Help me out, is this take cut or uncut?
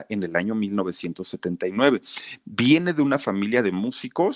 uncut